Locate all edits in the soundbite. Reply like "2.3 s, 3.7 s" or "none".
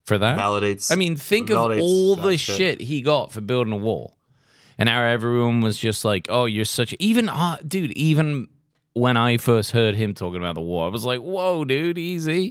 none